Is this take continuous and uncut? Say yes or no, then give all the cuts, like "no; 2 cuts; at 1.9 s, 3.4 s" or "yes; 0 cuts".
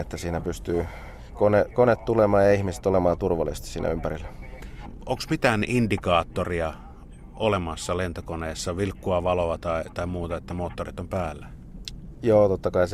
yes; 0 cuts